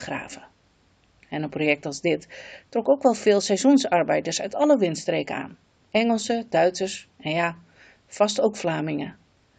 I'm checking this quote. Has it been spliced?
no; 0 cuts

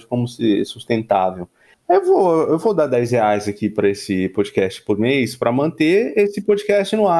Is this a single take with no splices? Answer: no; 1 cut; at 1.7 s

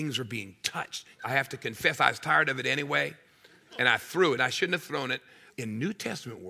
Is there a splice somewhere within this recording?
yes; 3 cuts; at 1.2 s, 4.4 s, 5.5 s

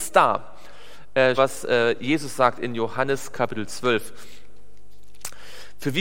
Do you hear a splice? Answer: yes; 1 cut; at 1.4 s

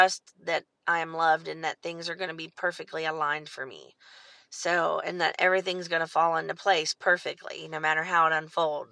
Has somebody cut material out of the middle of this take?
no; 0 cuts

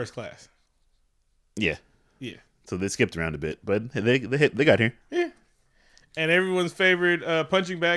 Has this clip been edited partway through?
no; 0 cuts

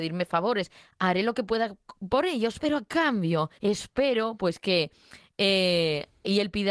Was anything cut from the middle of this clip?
yes; 1 cut; at 3.6 s

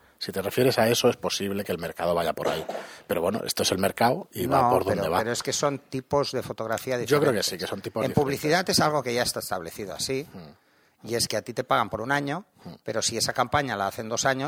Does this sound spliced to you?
no; 0 cuts

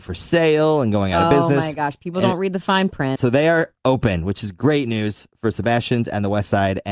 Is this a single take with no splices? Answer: no; 1 cut; at 3.2 s

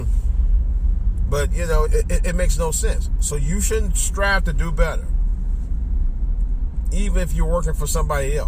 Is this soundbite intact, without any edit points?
no; 1 cut; at 1.8 s

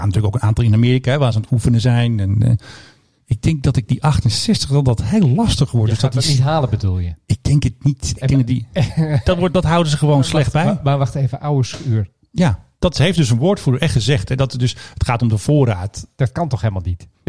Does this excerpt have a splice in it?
no; 0 cuts

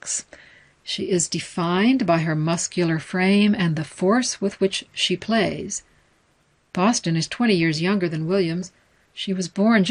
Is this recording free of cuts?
yes; 0 cuts

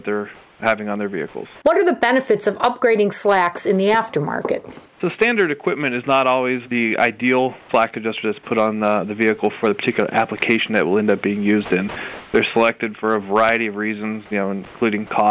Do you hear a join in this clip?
yes; 1 cut; at 1.6 s

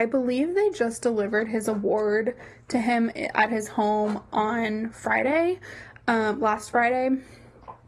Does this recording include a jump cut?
no; 0 cuts

